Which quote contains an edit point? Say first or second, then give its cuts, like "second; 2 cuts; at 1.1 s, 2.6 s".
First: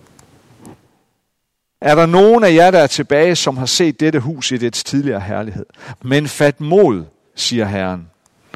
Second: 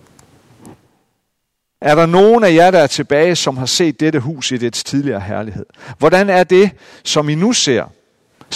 first; 2 cuts; at 6.0 s, 7.3 s